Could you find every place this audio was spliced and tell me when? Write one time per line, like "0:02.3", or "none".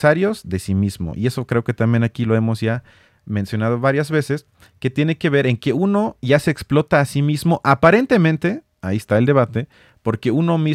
none